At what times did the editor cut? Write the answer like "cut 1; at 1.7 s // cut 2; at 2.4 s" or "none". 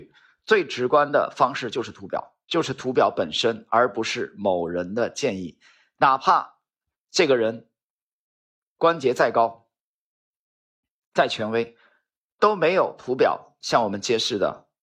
cut 1; at 2.4 s